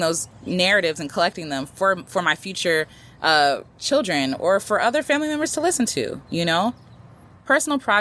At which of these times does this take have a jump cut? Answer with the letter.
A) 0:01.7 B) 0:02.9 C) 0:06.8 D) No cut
D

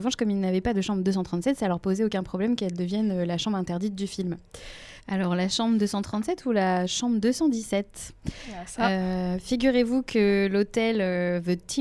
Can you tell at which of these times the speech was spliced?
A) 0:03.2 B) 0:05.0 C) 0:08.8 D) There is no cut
B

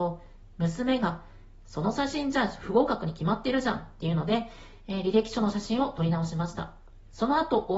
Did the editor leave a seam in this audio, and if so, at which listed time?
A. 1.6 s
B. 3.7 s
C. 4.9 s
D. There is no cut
D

